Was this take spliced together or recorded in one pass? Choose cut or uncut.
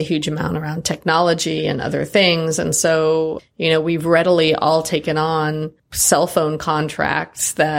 cut